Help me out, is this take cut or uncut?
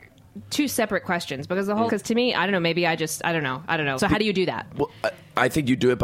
cut